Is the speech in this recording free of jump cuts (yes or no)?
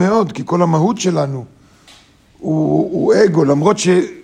yes